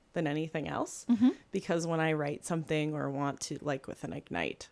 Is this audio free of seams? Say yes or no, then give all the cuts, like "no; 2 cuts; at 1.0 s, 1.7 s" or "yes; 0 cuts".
no; 1 cut; at 3.6 s